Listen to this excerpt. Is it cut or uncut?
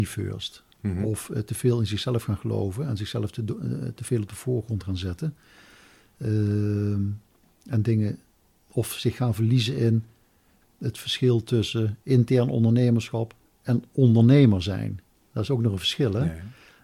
uncut